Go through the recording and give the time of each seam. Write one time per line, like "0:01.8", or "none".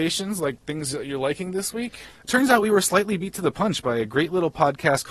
0:02.1